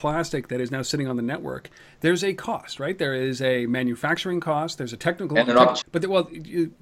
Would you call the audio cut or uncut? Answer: cut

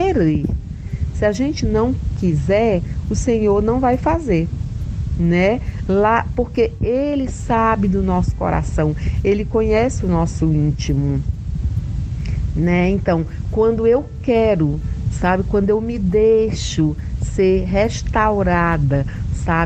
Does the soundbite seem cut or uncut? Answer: uncut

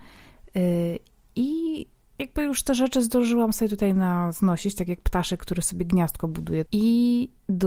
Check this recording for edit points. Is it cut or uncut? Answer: cut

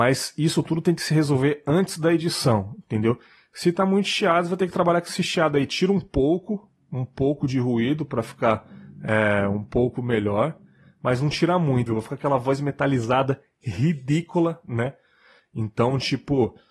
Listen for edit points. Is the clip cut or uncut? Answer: cut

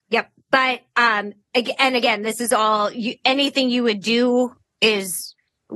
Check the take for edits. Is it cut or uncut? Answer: uncut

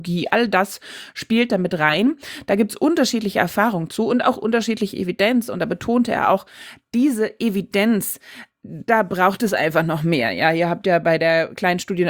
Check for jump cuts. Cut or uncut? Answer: uncut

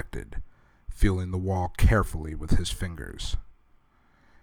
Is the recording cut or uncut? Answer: uncut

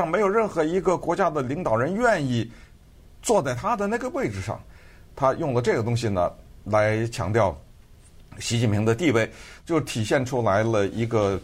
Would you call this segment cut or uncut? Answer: cut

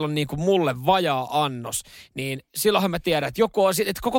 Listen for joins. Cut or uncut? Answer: uncut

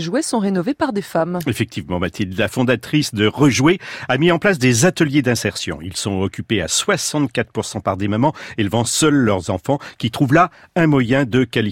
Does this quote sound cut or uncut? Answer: uncut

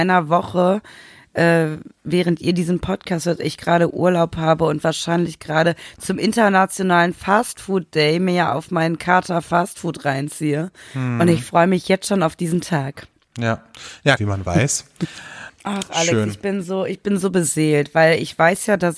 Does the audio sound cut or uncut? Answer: cut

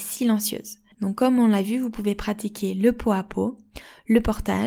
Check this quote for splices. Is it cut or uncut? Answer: cut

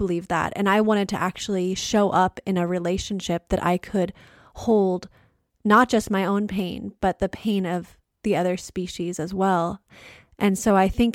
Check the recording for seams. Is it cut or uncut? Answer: uncut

